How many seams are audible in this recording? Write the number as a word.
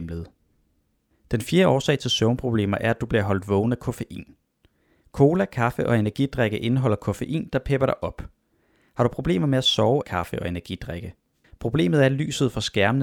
two